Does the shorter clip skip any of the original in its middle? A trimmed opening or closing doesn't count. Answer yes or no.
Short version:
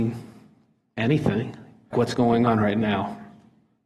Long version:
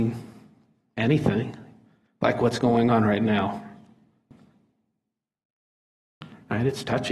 yes